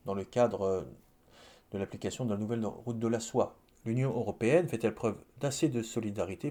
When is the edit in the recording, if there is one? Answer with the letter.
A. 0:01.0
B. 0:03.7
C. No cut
B